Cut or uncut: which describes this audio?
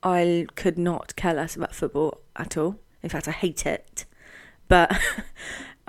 uncut